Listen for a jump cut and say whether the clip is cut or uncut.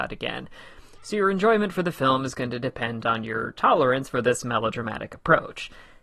uncut